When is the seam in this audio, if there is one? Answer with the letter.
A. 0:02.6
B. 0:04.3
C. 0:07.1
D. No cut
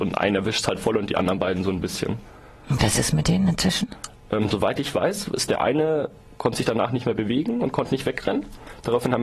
D